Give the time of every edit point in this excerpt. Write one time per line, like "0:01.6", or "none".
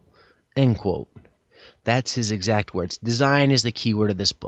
0:01.7